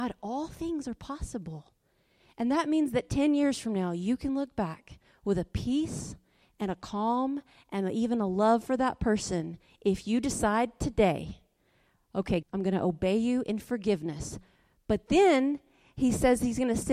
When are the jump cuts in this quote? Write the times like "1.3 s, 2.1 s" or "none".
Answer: 12.4 s